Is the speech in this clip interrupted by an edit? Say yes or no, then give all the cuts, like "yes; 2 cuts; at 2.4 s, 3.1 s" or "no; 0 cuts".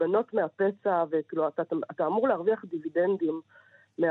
no; 0 cuts